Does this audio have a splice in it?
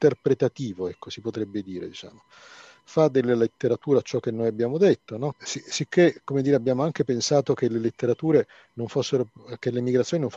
yes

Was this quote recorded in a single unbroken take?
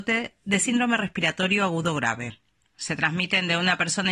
no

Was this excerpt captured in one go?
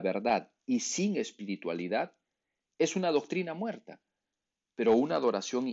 yes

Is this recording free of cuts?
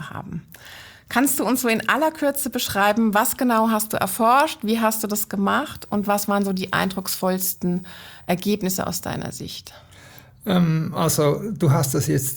yes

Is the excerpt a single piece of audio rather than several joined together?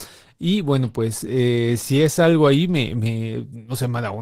yes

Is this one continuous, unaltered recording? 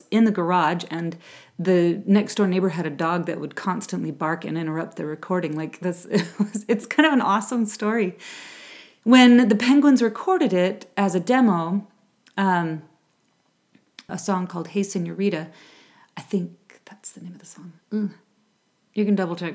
no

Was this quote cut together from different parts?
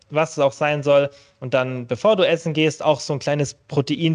no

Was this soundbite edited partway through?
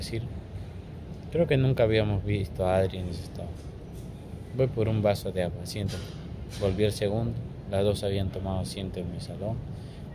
no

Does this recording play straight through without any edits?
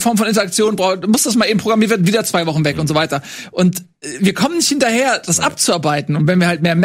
yes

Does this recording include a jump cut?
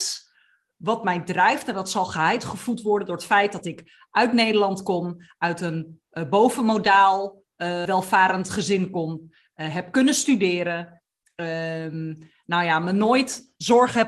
yes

